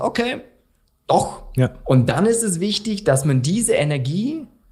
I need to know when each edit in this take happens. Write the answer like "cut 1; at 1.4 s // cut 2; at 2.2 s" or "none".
cut 1; at 1.8 s